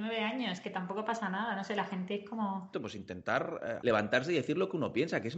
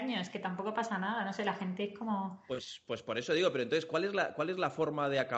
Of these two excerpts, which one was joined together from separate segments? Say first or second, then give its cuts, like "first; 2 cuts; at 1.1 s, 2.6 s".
first; 2 cuts; at 2.7 s, 3.8 s